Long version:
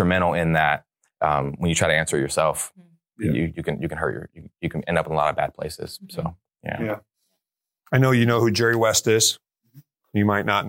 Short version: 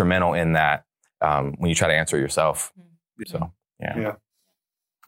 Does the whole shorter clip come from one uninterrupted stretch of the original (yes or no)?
no